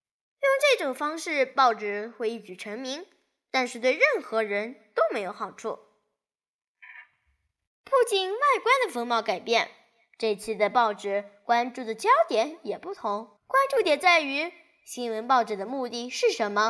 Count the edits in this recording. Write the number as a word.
two